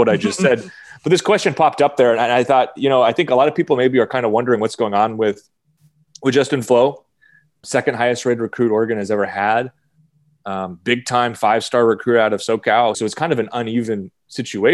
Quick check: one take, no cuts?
no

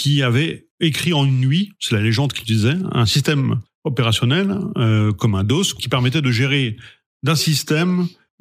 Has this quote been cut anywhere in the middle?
no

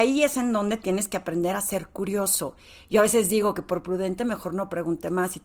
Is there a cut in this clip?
no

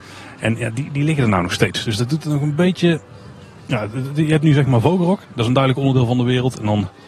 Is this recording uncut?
yes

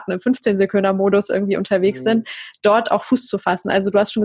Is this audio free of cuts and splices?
yes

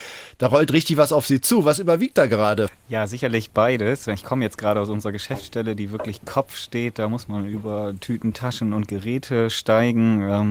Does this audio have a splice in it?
yes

